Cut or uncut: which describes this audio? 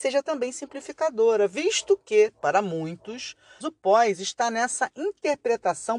cut